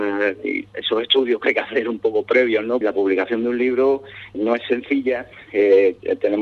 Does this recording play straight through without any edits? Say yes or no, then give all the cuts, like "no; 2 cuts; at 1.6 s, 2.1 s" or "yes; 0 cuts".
no; 2 cuts; at 2.8 s, 4.3 s